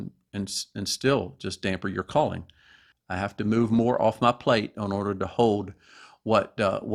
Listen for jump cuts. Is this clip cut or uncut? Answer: cut